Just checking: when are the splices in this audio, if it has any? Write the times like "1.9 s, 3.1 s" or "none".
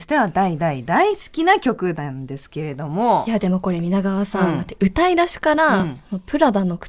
none